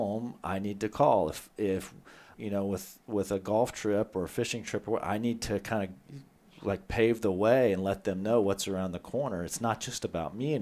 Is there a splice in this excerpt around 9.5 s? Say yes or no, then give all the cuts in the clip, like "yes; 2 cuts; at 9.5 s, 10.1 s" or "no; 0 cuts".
no; 1 cut; at 2.3 s